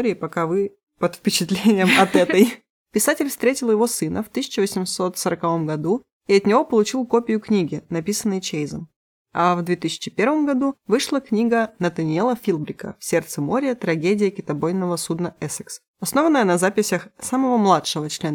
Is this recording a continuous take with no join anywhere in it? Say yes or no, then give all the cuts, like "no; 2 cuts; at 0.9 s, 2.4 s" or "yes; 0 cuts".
no; 2 cuts; at 2.8 s, 15.9 s